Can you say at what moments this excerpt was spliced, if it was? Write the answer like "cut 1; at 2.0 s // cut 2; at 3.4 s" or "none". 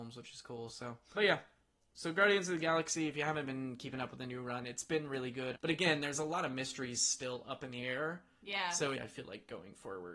cut 1; at 1.1 s // cut 2; at 5.5 s // cut 3; at 8.9 s